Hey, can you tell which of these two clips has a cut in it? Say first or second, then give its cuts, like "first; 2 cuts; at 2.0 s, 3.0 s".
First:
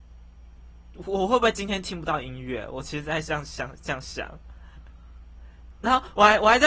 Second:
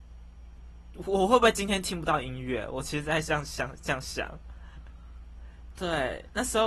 second; 1 cut; at 5.8 s